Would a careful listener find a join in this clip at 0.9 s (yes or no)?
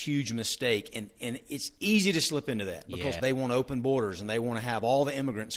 no